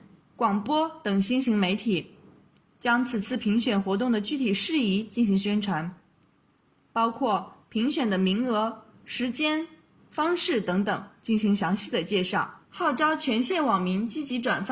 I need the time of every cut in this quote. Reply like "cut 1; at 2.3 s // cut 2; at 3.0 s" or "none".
cut 1; at 10.0 s // cut 2; at 12.6 s

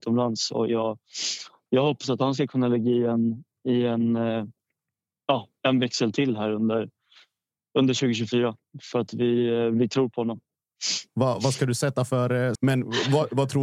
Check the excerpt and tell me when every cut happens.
cut 1; at 11.1 s // cut 2; at 12.5 s

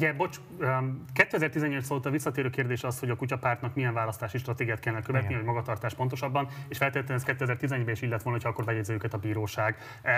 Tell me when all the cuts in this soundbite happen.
none

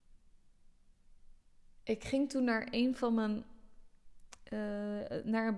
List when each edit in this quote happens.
none

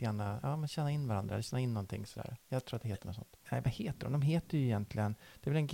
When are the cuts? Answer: cut 1; at 3.4 s

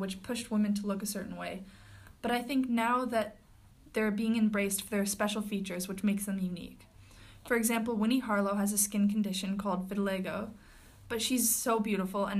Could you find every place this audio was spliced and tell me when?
none

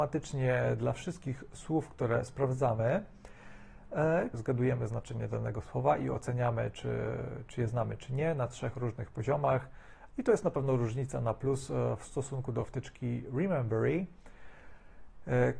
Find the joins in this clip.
cut 1; at 4.3 s // cut 2; at 10.1 s

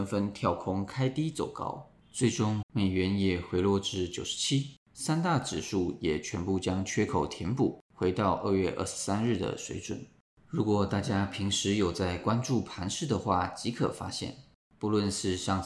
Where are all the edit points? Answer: cut 1; at 2.6 s

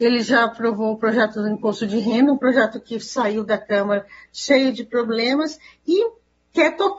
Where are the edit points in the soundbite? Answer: none

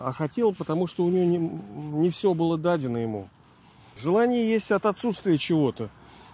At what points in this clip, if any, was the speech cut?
cut 1; at 4.0 s

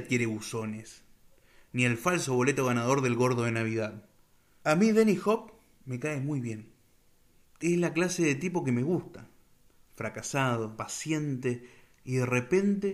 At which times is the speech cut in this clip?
cut 1; at 4.6 s // cut 2; at 10.8 s

